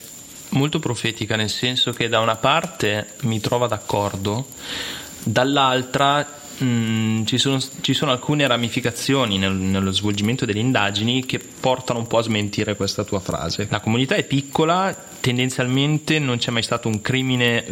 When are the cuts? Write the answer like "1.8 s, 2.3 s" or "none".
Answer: 13.7 s